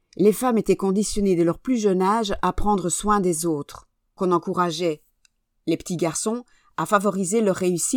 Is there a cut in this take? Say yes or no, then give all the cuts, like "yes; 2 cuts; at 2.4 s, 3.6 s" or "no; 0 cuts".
yes; 1 cut; at 4.2 s